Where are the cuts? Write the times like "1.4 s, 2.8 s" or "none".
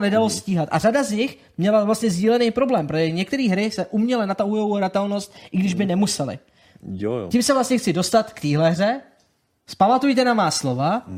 none